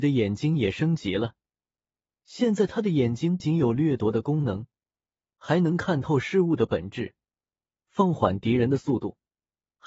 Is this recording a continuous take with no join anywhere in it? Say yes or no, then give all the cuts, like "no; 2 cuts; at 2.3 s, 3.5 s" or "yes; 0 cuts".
no; 1 cut; at 3.4 s